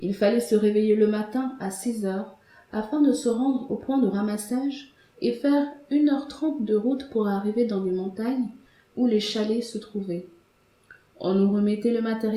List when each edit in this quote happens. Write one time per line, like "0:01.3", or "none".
none